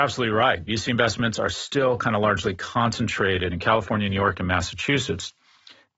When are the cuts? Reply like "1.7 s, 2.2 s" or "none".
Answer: none